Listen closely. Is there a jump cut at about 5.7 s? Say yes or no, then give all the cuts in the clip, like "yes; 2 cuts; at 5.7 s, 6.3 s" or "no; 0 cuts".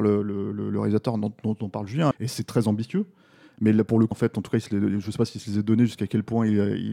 no; 2 cuts; at 2.1 s, 4.1 s